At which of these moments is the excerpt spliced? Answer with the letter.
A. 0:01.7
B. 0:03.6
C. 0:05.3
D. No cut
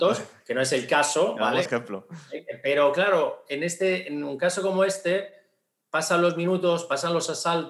A